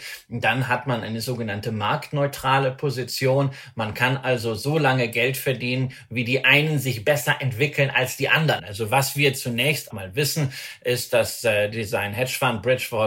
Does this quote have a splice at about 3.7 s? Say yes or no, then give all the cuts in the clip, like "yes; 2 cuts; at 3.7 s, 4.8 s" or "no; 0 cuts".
no; 2 cuts; at 8.6 s, 9.9 s